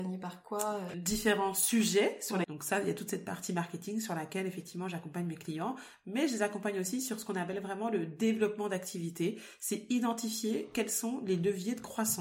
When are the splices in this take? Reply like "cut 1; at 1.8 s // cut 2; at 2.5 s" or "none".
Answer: cut 1; at 0.9 s // cut 2; at 2.4 s